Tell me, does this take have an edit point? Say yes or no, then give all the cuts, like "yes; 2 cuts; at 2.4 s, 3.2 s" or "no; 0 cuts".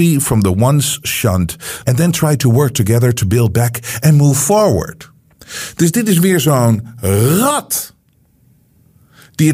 yes; 1 cut; at 1.8 s